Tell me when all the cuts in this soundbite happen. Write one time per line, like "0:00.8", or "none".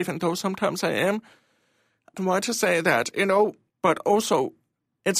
0:02.2
0:03.7